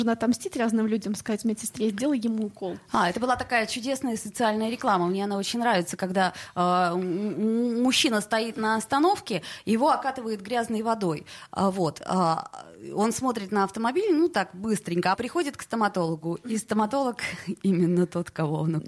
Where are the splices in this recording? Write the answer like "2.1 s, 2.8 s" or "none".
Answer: 15.1 s